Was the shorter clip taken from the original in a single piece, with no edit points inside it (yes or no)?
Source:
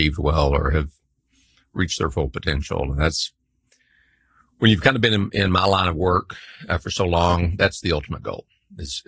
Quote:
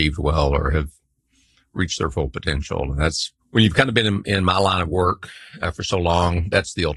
no